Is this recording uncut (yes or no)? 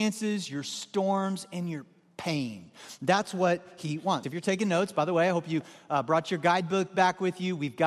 no